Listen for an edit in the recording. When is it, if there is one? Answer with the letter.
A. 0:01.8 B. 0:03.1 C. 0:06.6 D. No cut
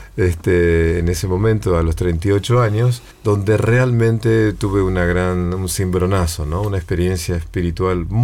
B